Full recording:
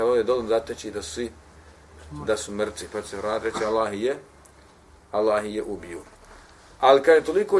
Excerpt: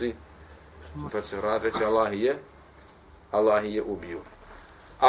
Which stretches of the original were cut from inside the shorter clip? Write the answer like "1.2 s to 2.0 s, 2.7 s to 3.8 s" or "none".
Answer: 2.3 s to 2.9 s